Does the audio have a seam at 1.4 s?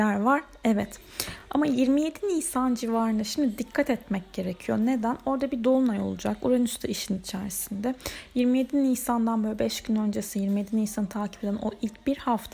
no; 0 cuts

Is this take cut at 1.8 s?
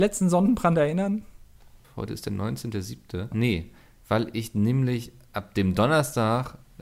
yes; 2 cuts; at 1.8 s, 3.3 s

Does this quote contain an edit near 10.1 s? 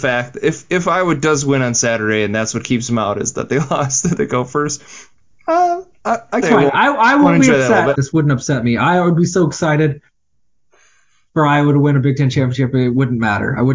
no; 2 cuts; at 6.4 s, 7.9 s

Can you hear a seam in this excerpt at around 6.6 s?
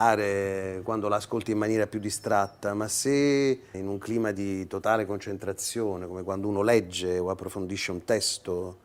no; 1 cut; at 3.7 s

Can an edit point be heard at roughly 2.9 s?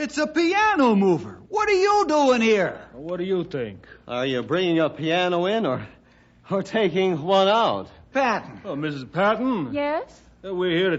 no; 1 cut; at 8.1 s

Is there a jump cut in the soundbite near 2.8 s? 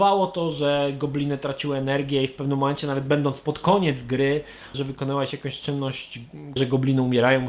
no; 2 cuts; at 4.7 s, 6.6 s

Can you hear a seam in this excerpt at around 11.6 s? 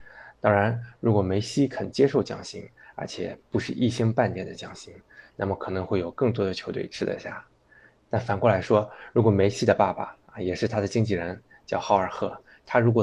no; 0 cuts

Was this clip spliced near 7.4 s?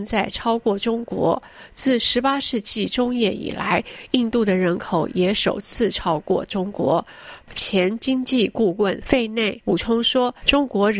yes; 1 cut; at 7.4 s

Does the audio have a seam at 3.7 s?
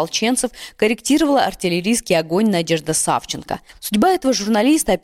yes; 1 cut; at 3.7 s

